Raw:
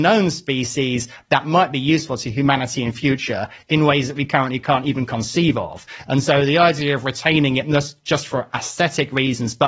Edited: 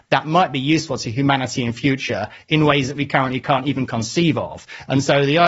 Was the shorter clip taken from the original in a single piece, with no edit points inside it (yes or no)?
yes